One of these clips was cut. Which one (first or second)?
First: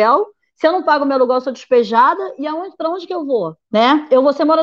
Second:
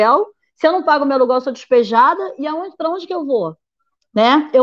first